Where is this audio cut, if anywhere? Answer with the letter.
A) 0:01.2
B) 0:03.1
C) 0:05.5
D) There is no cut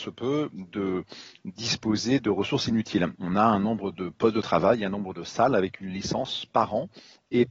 B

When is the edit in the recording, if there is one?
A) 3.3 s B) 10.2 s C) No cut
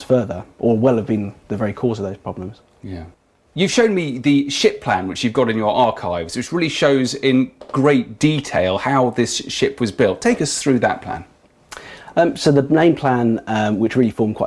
C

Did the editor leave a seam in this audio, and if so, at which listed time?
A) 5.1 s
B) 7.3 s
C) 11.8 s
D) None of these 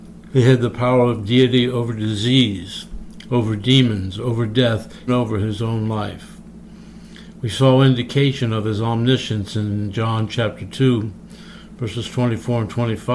A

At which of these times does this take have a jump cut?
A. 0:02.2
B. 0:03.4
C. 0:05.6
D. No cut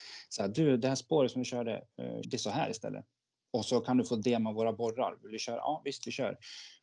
A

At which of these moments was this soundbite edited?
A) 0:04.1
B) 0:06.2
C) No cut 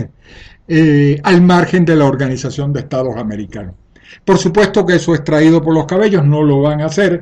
C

